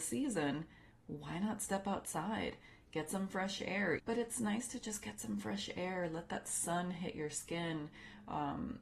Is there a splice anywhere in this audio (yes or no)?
yes